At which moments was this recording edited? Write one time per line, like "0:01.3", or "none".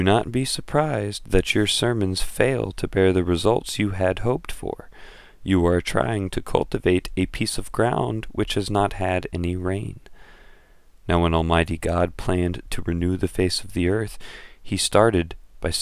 none